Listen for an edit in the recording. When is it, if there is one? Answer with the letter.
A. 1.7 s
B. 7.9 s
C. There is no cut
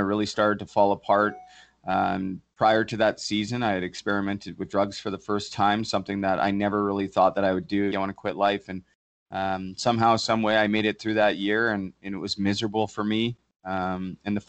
B